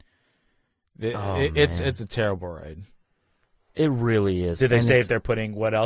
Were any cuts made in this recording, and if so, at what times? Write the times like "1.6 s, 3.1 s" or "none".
none